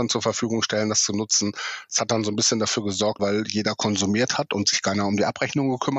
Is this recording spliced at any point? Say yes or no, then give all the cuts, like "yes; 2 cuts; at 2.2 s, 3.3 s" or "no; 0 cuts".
yes; 1 cut; at 3.2 s